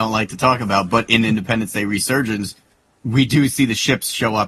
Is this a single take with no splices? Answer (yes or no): yes